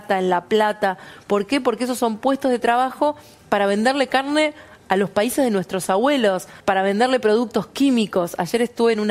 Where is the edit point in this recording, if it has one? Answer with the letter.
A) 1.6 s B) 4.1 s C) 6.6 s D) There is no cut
C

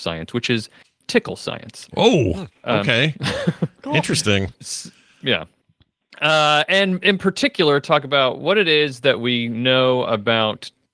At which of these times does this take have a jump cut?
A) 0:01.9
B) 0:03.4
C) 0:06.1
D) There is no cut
D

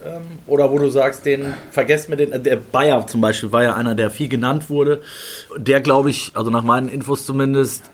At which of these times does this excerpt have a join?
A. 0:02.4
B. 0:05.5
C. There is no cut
B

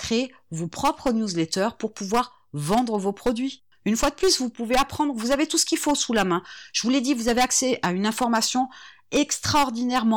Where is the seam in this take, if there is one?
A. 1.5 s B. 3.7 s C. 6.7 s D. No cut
B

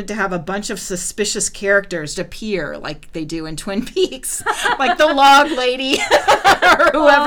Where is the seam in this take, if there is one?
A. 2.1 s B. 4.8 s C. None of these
A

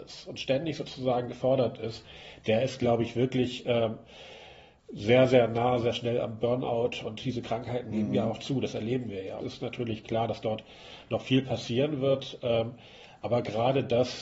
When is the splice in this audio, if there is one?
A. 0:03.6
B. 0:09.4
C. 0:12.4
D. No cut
B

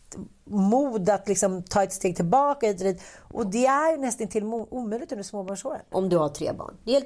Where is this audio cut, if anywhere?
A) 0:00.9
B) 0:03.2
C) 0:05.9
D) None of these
C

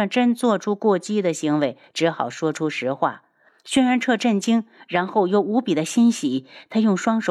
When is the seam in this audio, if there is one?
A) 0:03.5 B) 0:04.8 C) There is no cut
A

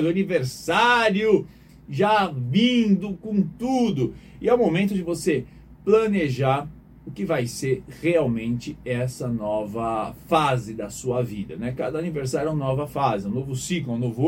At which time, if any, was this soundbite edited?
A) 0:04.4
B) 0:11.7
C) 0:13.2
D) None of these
D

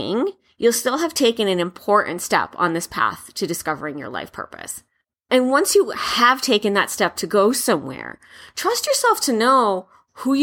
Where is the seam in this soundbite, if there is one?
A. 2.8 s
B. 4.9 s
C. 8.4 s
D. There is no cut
D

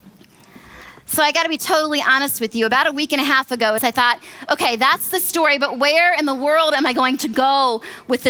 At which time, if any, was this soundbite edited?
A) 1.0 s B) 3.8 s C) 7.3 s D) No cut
B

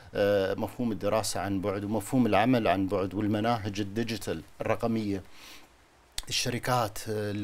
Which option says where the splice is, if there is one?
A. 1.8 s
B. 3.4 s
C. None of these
C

